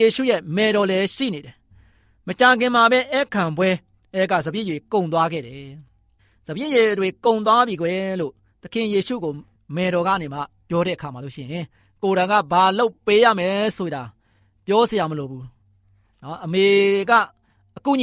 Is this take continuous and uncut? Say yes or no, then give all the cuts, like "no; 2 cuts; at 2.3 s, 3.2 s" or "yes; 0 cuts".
yes; 0 cuts